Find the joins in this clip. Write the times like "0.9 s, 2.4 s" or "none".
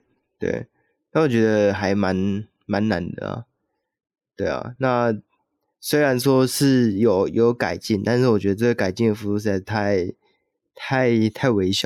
none

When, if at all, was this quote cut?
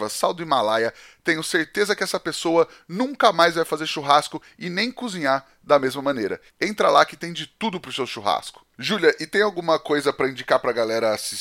6.5 s

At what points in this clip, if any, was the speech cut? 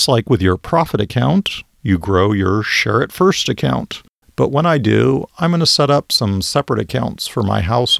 1.8 s, 4.2 s, 5.3 s

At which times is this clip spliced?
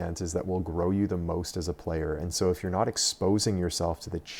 none

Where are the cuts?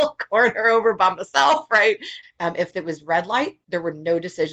2.2 s

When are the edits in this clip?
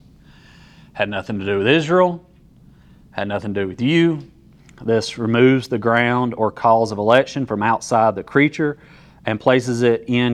4.6 s

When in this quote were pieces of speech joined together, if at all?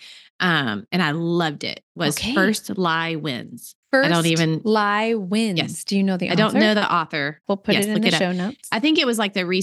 3.8 s, 7.4 s

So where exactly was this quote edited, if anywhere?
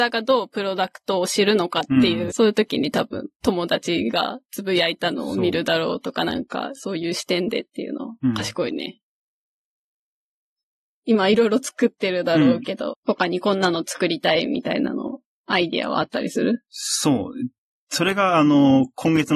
2.3 s, 12.9 s

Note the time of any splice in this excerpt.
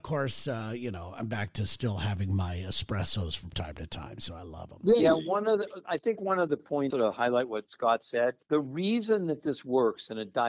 6.9 s, 8.4 s

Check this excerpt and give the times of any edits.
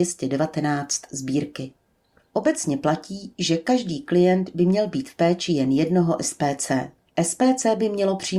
2.2 s, 7.1 s

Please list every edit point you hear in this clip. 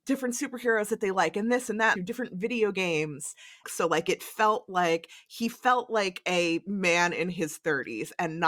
2.0 s, 3.6 s

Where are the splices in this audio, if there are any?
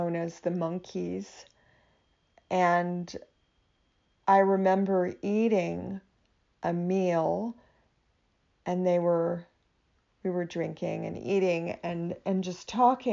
none

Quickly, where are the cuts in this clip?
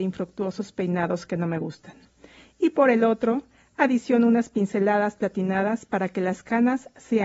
none

